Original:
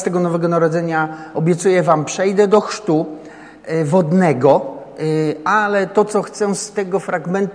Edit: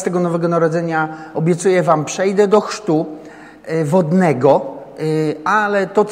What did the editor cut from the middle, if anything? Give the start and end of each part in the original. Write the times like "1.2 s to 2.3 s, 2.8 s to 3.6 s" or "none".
none